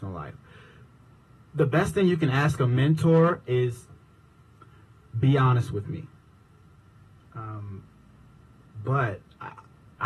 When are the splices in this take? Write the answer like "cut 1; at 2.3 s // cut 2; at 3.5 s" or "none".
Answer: cut 1; at 7.2 s